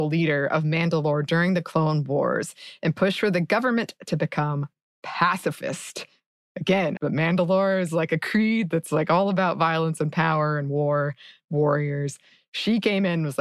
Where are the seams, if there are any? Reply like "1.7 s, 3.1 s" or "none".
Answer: 7.0 s